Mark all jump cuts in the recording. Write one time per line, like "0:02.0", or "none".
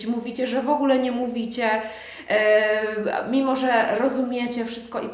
none